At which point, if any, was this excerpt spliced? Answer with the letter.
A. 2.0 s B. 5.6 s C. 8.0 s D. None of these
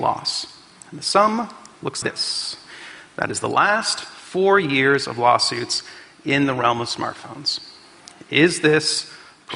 A